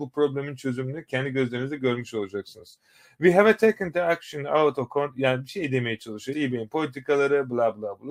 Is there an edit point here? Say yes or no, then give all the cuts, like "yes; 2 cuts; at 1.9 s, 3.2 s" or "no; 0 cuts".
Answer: yes; 1 cut; at 6.3 s